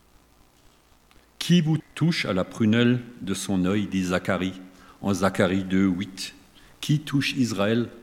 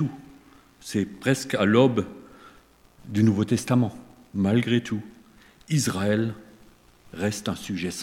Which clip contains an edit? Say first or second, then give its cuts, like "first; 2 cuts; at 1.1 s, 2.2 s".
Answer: first; 1 cut; at 1.8 s